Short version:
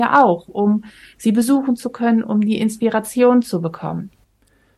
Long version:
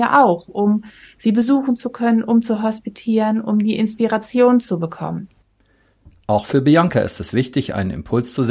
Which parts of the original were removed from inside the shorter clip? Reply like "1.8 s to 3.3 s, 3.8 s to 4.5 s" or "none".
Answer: 2.2 s to 3.4 s

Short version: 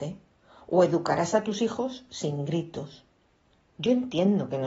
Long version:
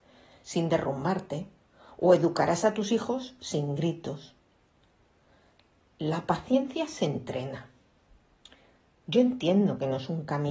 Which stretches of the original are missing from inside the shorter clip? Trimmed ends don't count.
4.9 s to 8.9 s

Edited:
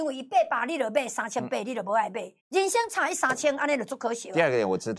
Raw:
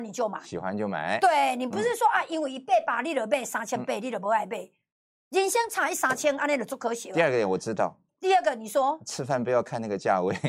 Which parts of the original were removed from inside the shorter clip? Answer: 4.8 s to 5.2 s

